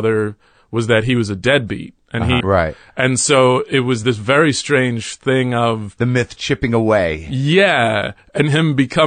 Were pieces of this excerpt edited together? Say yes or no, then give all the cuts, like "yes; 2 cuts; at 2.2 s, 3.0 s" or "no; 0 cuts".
yes; 1 cut; at 2.4 s